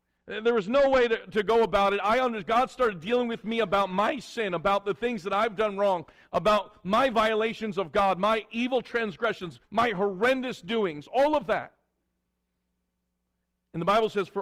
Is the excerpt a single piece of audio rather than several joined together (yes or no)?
no